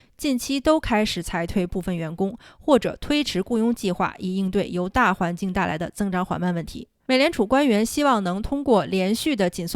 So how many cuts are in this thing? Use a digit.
1